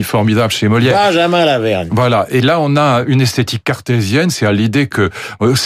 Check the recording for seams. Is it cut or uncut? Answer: uncut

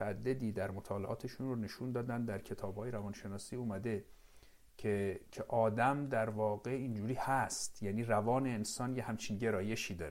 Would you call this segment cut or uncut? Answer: cut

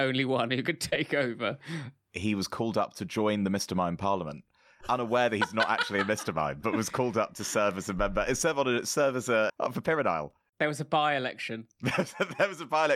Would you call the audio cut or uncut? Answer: cut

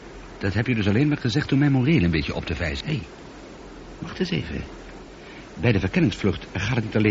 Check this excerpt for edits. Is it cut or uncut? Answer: cut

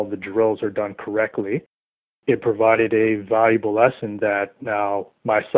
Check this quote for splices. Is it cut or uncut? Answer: uncut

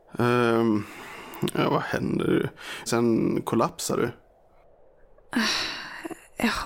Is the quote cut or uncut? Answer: cut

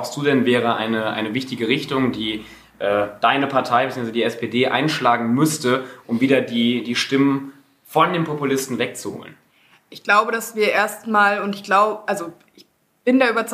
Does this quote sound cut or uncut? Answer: uncut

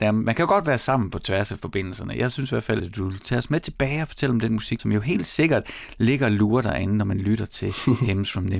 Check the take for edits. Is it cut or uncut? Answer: cut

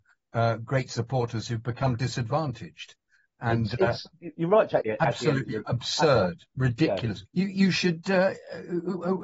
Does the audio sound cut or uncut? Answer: cut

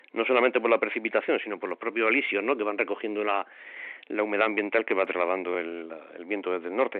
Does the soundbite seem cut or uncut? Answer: uncut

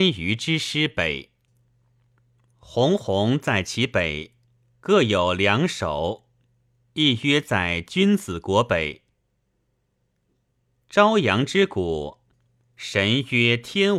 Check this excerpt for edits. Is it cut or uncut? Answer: uncut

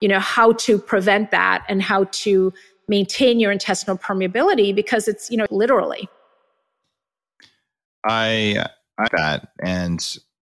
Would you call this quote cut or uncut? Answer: cut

